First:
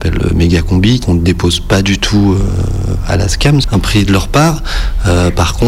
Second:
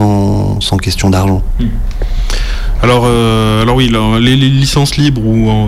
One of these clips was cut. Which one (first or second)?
first